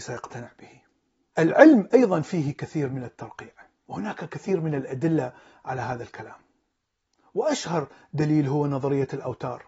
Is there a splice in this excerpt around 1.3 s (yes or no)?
yes